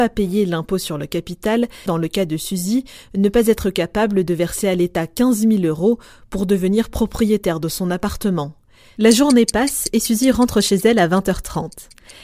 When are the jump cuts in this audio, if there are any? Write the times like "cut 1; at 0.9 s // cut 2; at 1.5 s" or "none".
cut 1; at 1.9 s // cut 2; at 9.0 s